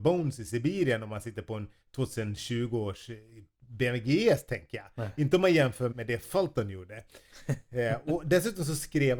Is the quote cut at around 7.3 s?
yes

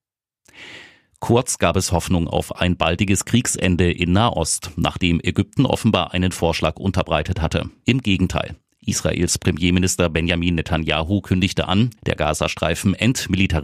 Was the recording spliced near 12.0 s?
yes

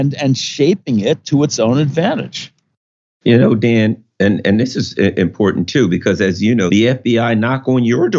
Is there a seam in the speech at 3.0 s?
no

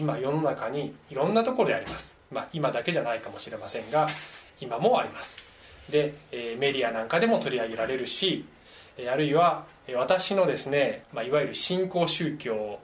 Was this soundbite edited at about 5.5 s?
no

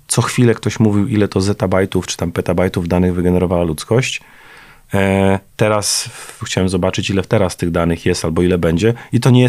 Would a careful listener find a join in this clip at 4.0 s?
no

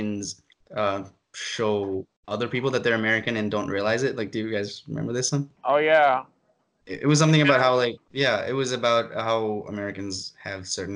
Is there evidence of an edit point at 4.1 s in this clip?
no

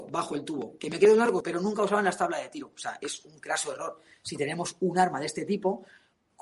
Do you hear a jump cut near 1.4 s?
yes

